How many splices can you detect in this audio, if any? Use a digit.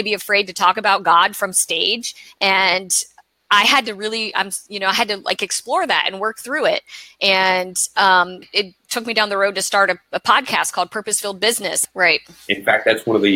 2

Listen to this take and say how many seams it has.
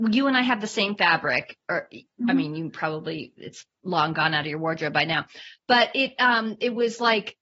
0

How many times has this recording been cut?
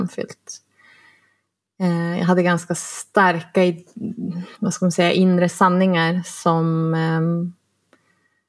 1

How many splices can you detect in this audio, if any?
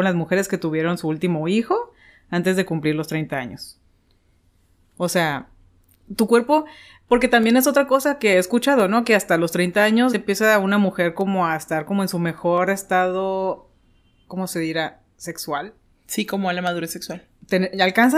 1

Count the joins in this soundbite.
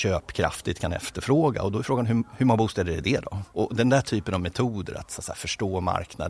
1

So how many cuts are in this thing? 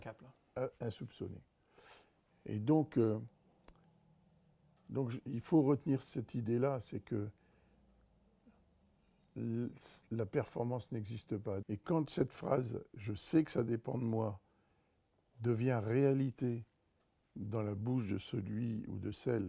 2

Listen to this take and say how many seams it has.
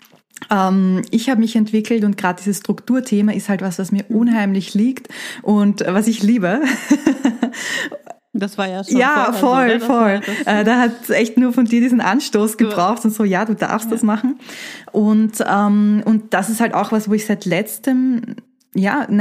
0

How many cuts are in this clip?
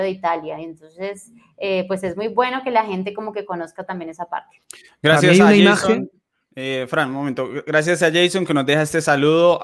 0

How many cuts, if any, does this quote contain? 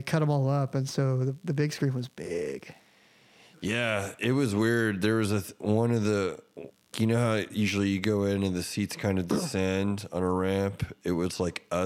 1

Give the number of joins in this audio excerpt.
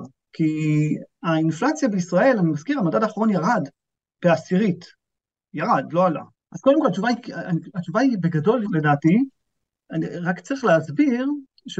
2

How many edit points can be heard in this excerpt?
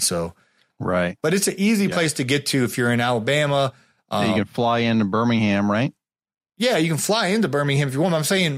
0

